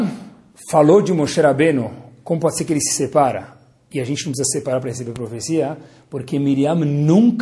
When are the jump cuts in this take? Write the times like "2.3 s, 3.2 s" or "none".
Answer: none